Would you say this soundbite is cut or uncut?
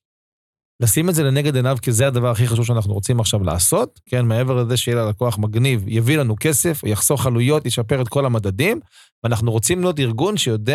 cut